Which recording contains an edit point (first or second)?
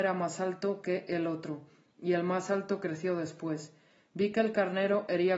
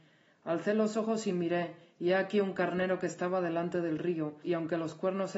second